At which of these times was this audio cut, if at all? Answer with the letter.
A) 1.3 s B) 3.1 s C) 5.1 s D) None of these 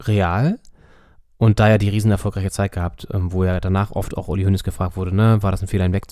D